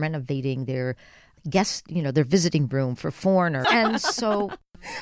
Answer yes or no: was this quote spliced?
yes